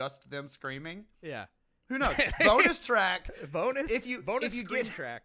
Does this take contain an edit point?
no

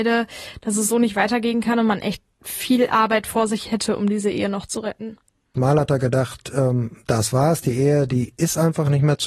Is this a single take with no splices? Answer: no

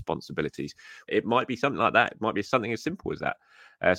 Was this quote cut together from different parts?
yes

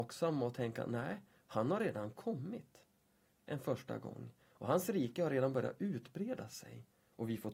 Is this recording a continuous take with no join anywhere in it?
yes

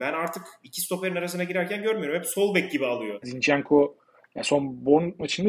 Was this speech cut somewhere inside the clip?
yes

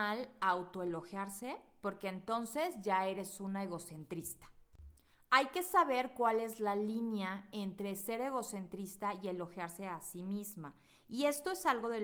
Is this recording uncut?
yes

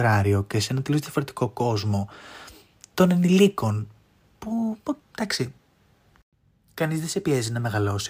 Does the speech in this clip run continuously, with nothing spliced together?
no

